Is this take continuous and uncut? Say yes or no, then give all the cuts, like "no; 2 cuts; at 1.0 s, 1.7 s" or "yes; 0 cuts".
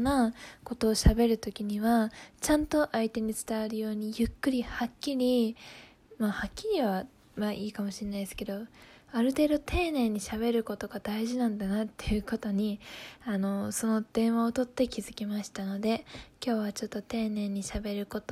yes; 0 cuts